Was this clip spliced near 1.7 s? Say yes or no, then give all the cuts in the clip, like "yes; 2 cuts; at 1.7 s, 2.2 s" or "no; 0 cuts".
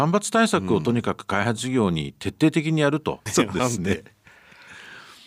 no; 1 cut; at 3.3 s